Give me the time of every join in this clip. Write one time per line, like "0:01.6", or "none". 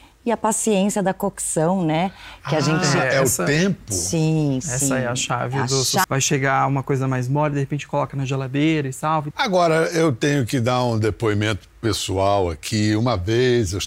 0:06.0
0:09.3